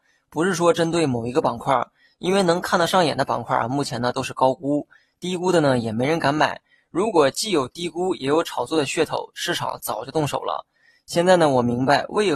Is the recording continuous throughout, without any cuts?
yes; 0 cuts

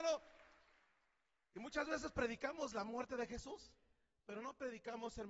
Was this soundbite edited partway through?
no; 0 cuts

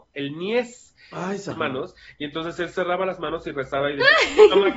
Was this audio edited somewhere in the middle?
yes; 1 cut; at 1.5 s

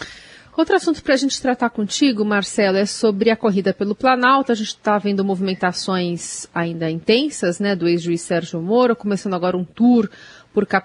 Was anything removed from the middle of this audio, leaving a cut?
no; 0 cuts

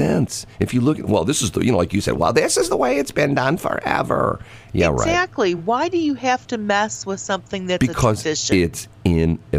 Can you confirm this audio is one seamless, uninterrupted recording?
yes; 0 cuts

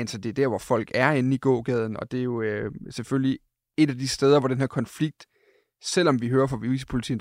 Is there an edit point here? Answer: no; 0 cuts

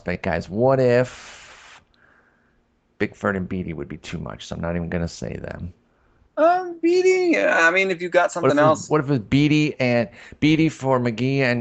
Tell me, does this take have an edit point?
no; 0 cuts

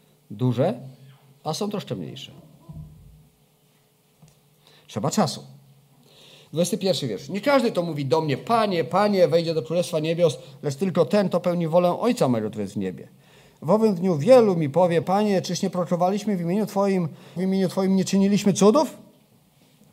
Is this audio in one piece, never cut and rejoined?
no; 2 cuts; at 15.0 s, 17.4 s

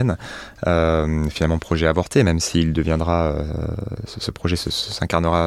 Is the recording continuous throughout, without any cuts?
yes; 0 cuts

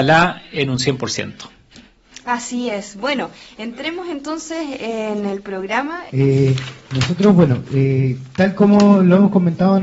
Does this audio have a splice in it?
yes; 1 cut; at 6.1 s

